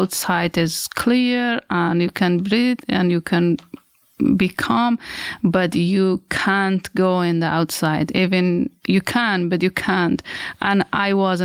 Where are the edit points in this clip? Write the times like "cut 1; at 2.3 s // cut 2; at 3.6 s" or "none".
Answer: none